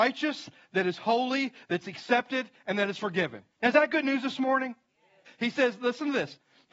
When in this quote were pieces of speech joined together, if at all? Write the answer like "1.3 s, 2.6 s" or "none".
3.5 s, 5.3 s